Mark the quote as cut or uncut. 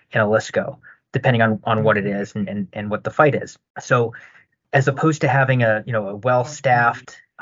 uncut